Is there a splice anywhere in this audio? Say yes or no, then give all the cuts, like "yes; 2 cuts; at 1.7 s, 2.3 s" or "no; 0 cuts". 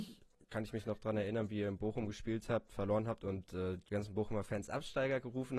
yes; 1 cut; at 3.9 s